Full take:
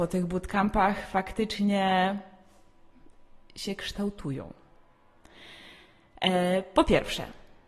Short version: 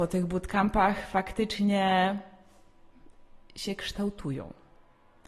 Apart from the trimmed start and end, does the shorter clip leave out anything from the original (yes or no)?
no